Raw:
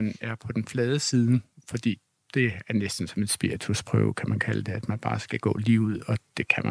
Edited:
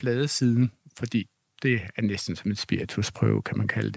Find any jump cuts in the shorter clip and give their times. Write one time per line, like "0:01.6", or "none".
none